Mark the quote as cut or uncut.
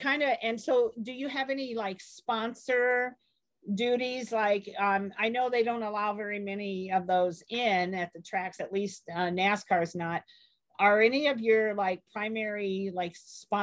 uncut